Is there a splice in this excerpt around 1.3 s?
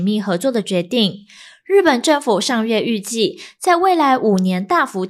no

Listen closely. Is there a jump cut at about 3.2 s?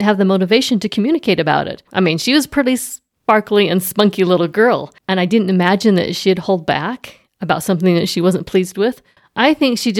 no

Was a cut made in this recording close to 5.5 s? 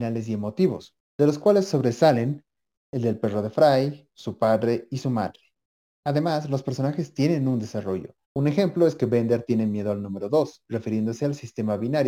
no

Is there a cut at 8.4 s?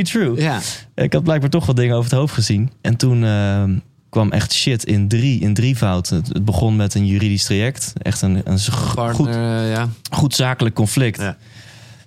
no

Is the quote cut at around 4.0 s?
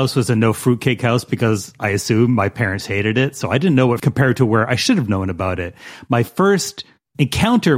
yes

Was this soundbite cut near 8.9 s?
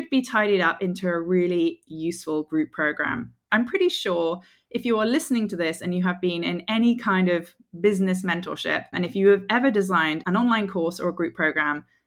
yes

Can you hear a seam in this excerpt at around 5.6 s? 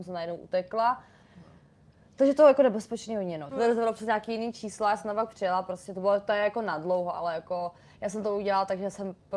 no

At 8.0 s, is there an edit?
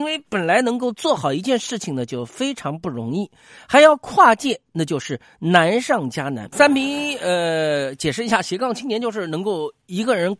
no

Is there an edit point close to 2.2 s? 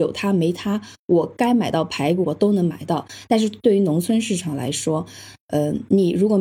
yes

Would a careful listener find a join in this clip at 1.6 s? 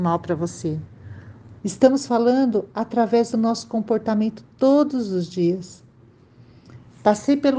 yes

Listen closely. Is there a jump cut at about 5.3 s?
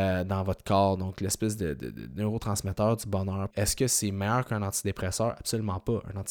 no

